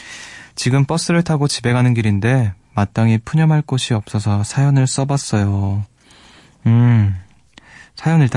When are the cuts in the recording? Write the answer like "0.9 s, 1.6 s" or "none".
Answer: none